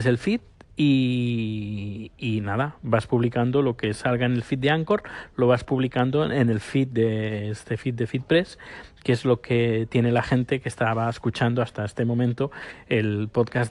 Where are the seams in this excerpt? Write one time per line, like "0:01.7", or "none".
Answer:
none